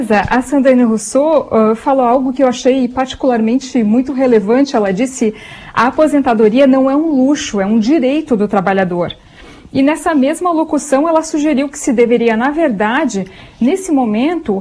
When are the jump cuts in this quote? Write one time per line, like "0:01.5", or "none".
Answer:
none